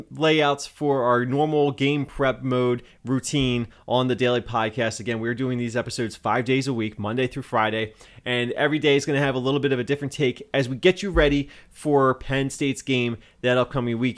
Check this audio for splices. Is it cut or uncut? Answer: uncut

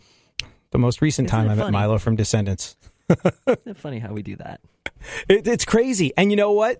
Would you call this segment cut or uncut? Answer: uncut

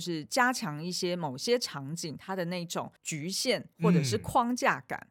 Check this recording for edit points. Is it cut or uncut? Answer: cut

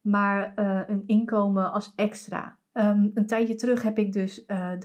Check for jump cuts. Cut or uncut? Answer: cut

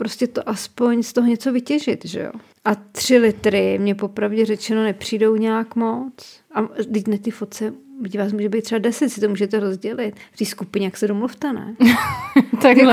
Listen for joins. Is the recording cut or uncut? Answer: uncut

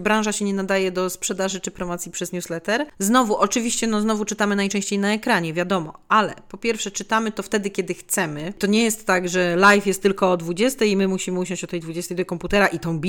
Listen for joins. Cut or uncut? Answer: cut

